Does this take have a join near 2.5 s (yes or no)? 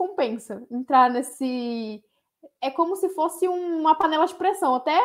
yes